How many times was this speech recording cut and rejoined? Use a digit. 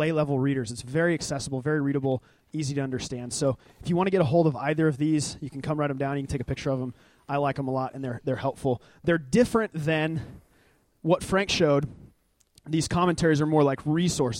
0